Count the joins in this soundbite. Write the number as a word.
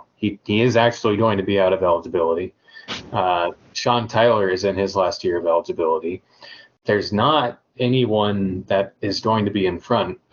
zero